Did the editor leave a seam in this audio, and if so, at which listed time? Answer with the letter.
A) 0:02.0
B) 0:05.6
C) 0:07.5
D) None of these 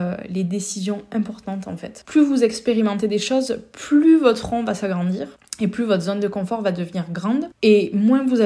A